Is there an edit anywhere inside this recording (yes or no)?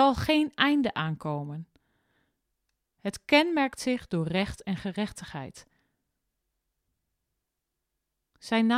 no